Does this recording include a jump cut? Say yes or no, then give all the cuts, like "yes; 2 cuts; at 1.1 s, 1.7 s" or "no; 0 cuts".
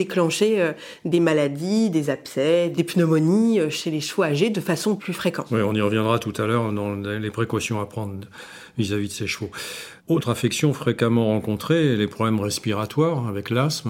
yes; 1 cut; at 10.0 s